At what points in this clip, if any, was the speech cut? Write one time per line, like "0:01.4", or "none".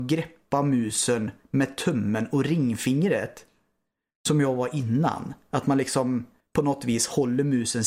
none